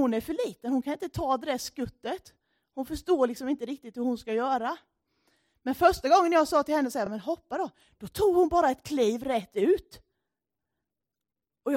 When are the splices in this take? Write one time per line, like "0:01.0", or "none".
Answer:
none